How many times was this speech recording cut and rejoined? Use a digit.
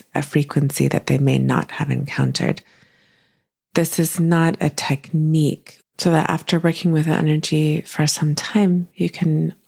1